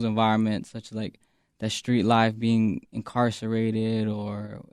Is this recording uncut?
yes; 0 cuts

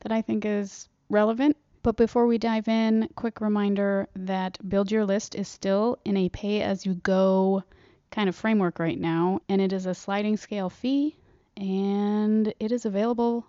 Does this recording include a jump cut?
yes; 2 cuts; at 1.7 s, 9.4 s

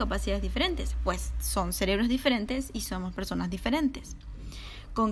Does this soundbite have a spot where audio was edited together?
no; 0 cuts

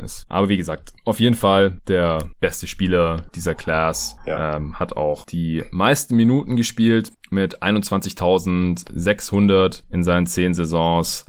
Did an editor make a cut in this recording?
no; 0 cuts

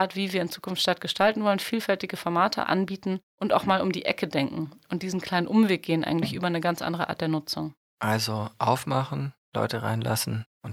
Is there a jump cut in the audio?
no; 0 cuts

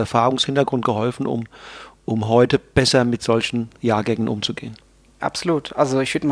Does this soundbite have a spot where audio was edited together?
no; 0 cuts

